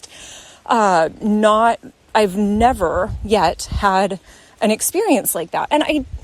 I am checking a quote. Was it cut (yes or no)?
no